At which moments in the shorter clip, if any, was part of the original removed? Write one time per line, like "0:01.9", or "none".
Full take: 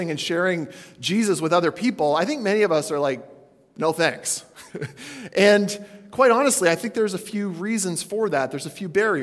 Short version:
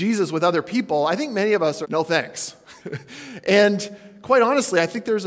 0:01.8